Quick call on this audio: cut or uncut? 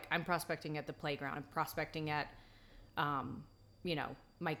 uncut